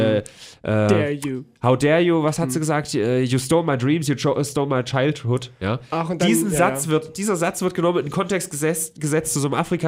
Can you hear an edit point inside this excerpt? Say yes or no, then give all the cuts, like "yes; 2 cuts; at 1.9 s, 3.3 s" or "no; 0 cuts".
no; 0 cuts